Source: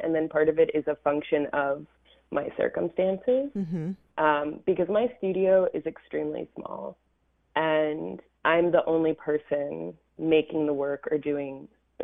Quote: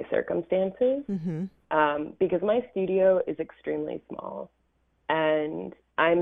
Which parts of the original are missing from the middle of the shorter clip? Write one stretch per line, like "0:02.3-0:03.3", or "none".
none

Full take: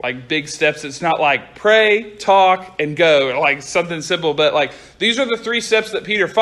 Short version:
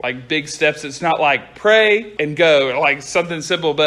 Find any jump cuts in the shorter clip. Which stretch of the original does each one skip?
0:02.2-0:02.8

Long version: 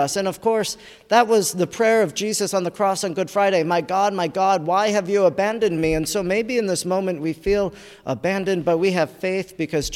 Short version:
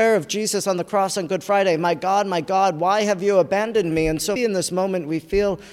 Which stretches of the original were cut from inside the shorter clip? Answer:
0:06.2-0:06.5

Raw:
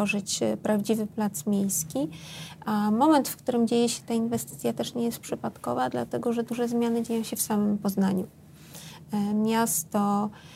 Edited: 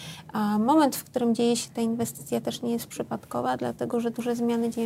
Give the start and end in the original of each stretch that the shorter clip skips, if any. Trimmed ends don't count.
none

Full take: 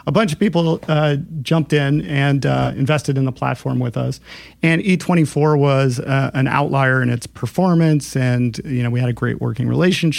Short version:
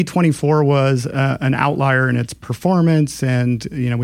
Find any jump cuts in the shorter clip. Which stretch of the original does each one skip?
none

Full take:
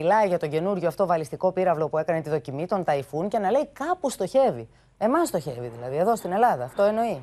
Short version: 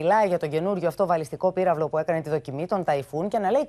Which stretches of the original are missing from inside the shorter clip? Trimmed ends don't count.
none

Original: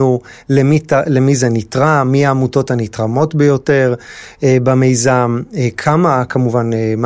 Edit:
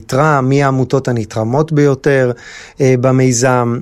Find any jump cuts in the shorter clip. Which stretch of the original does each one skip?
none

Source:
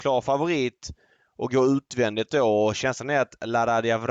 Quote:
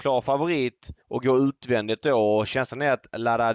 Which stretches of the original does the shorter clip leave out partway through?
0:01.0-0:01.3

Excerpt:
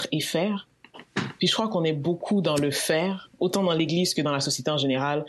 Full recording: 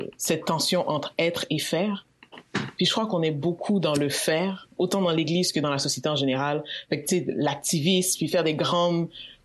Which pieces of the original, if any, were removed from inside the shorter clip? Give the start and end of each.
none

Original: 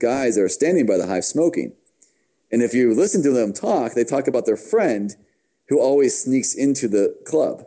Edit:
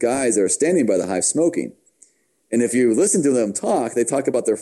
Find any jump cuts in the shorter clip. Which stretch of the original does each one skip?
none

